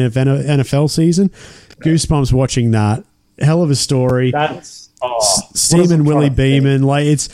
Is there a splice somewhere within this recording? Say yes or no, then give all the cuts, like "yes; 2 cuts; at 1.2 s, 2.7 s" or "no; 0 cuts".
no; 0 cuts